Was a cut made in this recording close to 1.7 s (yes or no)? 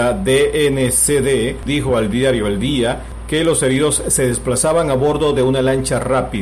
yes